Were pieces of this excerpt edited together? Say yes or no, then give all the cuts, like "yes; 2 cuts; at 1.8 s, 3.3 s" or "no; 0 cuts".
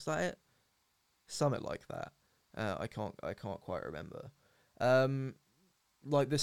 no; 0 cuts